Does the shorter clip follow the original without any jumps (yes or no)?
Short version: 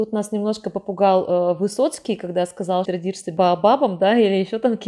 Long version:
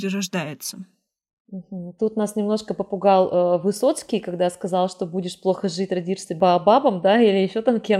no